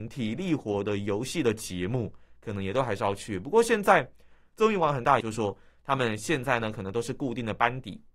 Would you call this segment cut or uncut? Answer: cut